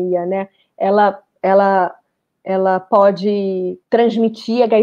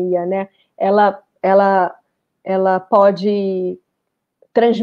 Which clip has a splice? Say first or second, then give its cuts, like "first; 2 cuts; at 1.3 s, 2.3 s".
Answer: first; 1 cut; at 3.8 s